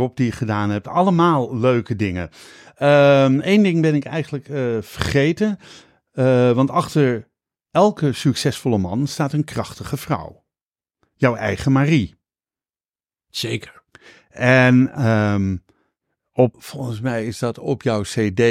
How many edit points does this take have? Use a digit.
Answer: 1